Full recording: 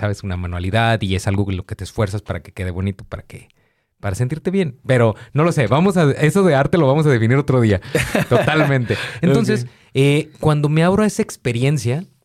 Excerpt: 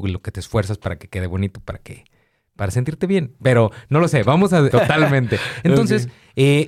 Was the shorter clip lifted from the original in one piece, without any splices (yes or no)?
no